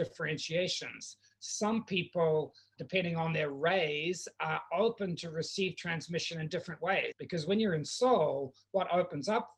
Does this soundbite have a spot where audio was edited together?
yes; 2 cuts; at 2.8 s, 7.1 s

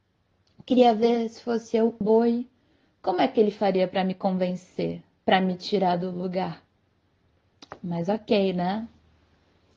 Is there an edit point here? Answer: yes; 1 cut; at 2.0 s

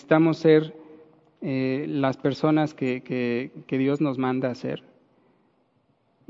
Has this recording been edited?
no; 0 cuts

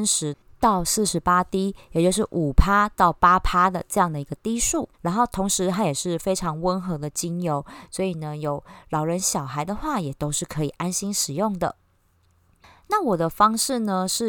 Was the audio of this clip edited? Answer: yes; 1 cut; at 4.9 s

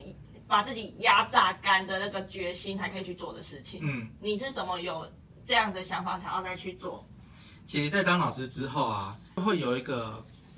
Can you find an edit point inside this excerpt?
no; 0 cuts

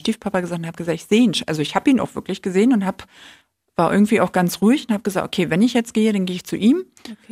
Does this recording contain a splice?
no; 0 cuts

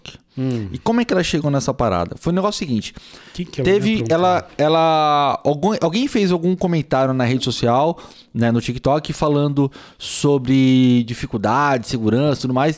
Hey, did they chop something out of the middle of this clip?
no; 0 cuts

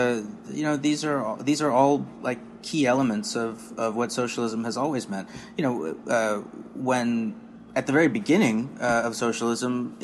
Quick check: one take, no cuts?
yes; 0 cuts

